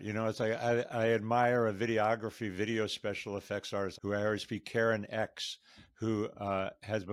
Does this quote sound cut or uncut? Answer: cut